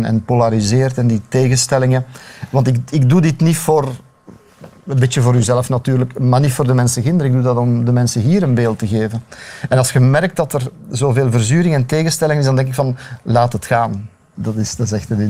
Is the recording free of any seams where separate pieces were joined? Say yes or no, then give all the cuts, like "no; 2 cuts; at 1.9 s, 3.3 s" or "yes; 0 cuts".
no; 1 cut; at 14.3 s